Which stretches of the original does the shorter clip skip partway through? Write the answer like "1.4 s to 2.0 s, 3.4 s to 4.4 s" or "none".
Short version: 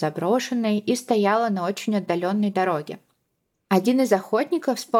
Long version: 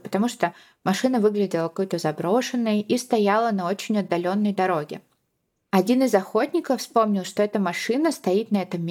none